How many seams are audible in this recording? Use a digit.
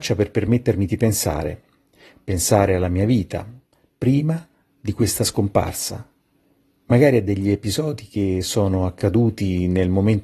0